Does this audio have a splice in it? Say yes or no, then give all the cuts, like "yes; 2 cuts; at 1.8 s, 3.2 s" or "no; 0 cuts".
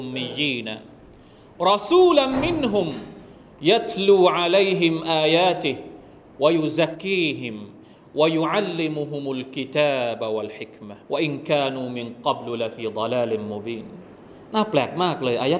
yes; 2 cuts; at 6.9 s, 11.0 s